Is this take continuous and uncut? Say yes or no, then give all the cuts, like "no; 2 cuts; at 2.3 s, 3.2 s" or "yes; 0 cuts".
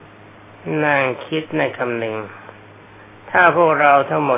yes; 0 cuts